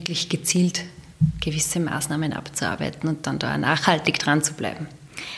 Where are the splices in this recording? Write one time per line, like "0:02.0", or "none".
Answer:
none